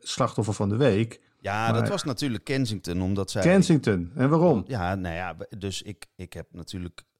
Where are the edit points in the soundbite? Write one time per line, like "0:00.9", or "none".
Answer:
none